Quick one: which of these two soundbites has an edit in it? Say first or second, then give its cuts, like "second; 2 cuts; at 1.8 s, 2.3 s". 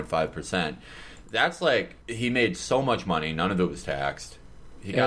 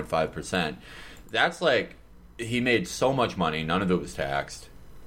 first; 1 cut; at 2.0 s